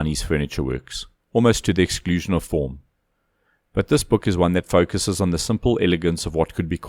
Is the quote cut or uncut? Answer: cut